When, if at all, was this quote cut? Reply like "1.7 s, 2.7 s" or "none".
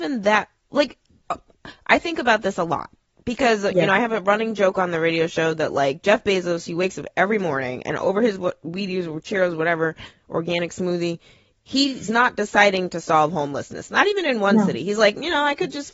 none

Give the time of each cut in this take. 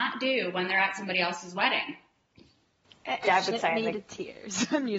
3.2 s

